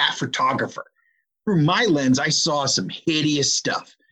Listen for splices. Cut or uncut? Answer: cut